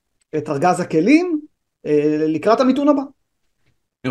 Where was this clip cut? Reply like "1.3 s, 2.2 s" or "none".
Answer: none